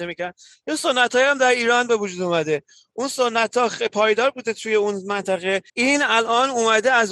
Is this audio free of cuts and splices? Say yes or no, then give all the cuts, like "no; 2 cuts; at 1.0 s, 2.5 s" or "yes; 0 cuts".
no; 1 cut; at 5.7 s